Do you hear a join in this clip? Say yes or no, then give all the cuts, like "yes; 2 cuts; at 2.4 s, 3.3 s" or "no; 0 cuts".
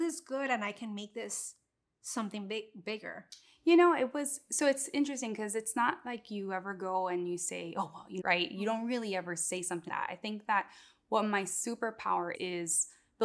yes; 3 cuts; at 8.2 s, 9.9 s, 12.3 s